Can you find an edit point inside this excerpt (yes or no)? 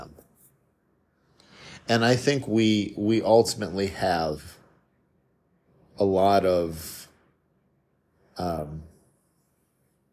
no